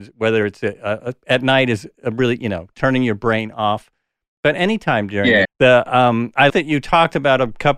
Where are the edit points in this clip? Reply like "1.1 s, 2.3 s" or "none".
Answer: 5.4 s, 6.5 s